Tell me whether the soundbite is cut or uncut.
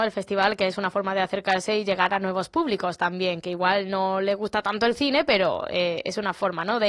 uncut